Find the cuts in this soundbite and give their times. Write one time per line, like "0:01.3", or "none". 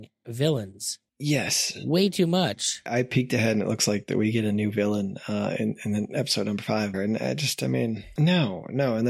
0:06.9
0:08.2